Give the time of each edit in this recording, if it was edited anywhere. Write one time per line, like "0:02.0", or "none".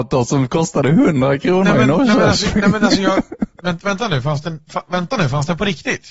none